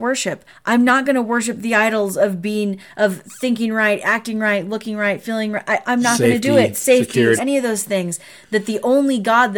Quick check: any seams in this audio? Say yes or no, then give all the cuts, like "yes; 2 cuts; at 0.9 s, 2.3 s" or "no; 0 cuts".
yes; 2 cuts; at 5.8 s, 7.4 s